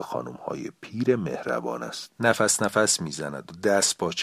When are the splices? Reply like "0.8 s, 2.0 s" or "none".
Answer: 2.1 s